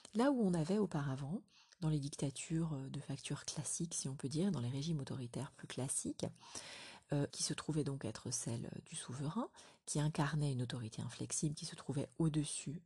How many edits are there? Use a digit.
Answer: 1